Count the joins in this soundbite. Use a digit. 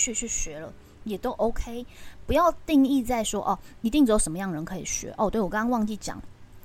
0